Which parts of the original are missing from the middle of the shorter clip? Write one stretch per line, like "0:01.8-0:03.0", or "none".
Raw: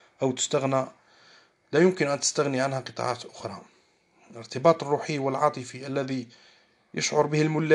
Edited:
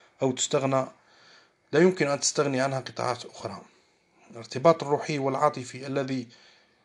none